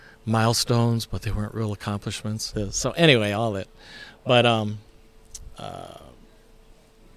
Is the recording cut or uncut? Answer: cut